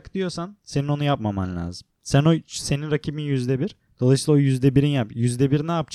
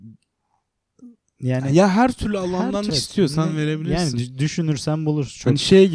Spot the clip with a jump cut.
second; 1 cut; at 2.9 s

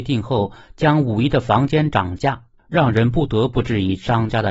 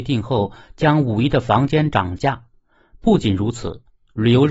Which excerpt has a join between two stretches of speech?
first; 1 cut; at 2.6 s

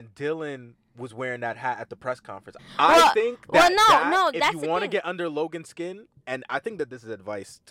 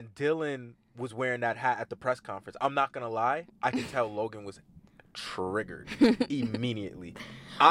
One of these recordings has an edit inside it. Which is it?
first; 1 cut; at 2.6 s

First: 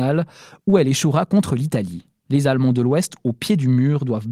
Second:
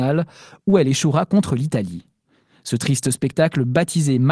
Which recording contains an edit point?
first; 1 cut; at 2.3 s

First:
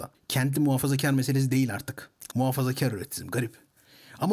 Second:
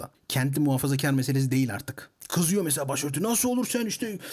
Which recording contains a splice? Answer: first; 1 cut; at 2.3 s

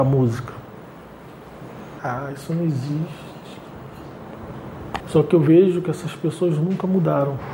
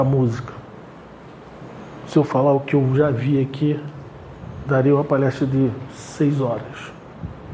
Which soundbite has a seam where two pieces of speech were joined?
first; 2 cuts; at 2.0 s, 5.0 s

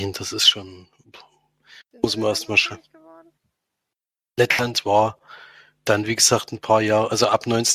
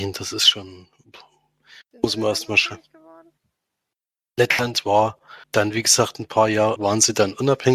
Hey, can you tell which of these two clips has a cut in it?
second; 2 cuts; at 5.4 s, 6.8 s

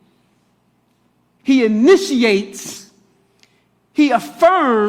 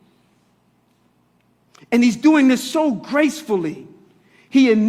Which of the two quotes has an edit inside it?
first; 1 cut; at 1.4 s

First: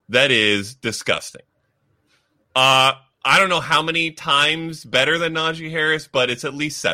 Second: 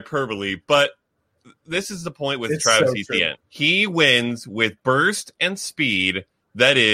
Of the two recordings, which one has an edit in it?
second; 1 cut; at 3.4 s

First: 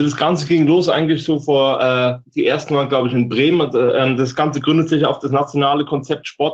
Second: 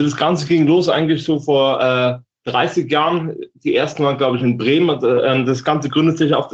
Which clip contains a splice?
first; 1 cut; at 2.2 s

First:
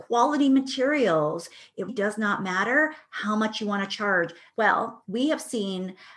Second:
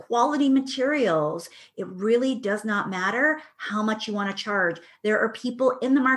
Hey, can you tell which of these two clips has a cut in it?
first; 2 cuts; at 1.9 s, 4.5 s

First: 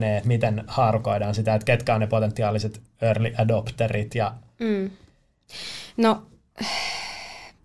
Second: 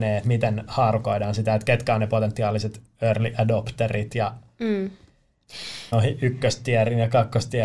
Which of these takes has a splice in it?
second; 1 cut; at 5.9 s

